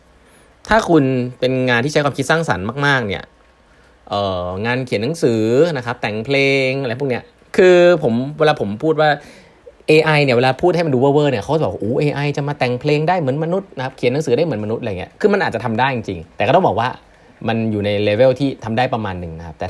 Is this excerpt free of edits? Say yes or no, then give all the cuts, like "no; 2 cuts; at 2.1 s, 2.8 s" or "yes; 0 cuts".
no; 1 cut; at 16.3 s